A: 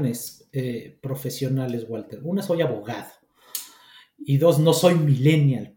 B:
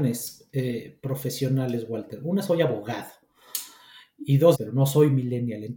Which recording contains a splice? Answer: B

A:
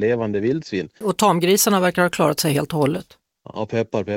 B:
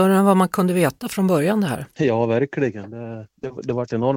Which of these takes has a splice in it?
A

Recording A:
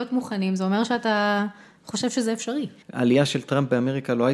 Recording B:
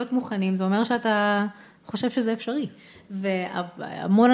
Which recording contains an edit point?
A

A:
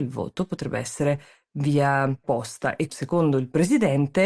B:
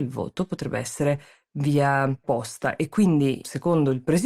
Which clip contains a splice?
A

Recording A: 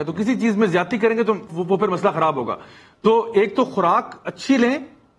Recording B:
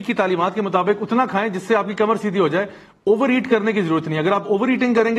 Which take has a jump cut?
A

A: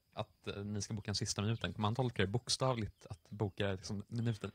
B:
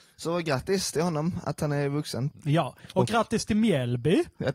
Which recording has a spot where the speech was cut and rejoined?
B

